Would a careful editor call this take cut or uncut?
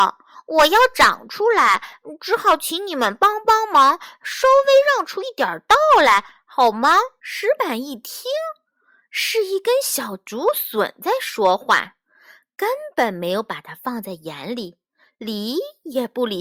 cut